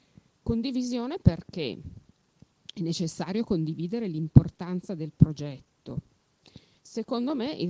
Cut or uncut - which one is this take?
cut